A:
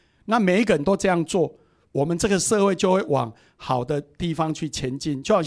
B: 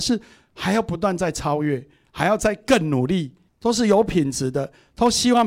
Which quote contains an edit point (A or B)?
B